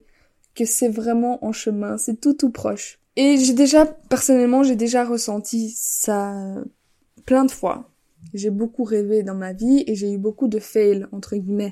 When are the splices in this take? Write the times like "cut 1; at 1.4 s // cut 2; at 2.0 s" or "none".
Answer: cut 1; at 3.1 s